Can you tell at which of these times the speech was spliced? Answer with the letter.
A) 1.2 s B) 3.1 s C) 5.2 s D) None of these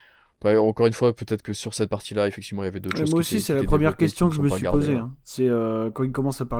D